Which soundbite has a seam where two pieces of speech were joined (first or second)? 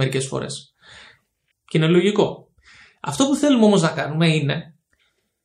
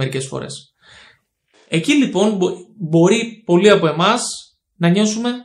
first